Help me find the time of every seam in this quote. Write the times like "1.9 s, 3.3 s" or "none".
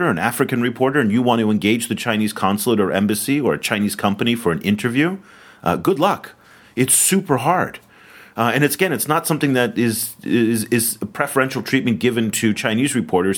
none